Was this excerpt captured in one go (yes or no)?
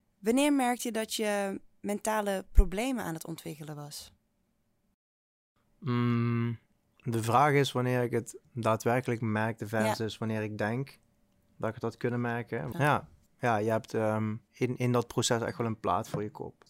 no